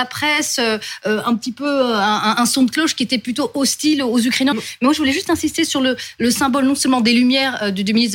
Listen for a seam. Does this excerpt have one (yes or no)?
yes